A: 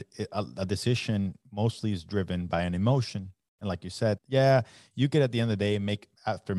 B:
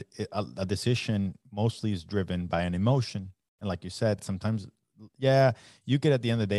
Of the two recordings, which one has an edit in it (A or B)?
A